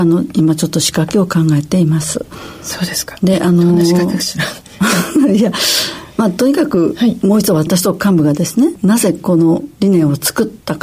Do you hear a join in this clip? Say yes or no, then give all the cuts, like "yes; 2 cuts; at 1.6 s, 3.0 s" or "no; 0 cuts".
no; 0 cuts